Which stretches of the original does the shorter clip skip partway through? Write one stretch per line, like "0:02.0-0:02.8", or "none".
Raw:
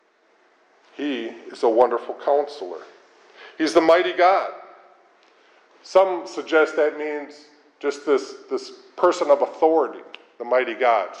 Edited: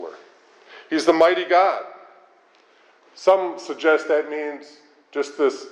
none